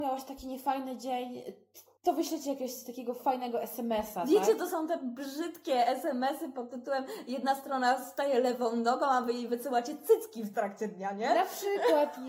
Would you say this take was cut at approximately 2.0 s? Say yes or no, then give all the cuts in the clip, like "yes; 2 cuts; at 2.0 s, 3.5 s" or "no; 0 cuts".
yes; 1 cut; at 2.0 s